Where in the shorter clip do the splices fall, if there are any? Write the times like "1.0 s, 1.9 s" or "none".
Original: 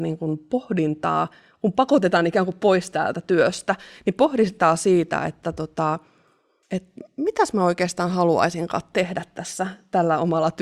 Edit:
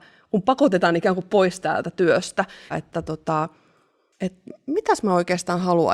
2.7 s